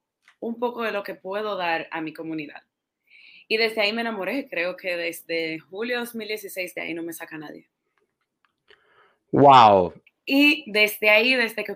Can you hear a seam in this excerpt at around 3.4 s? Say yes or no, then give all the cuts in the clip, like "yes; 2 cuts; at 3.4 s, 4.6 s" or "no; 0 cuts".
no; 1 cut; at 10.1 s